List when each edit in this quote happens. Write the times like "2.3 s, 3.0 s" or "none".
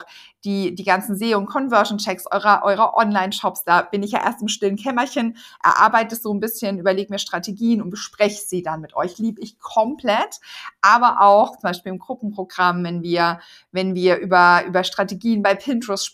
none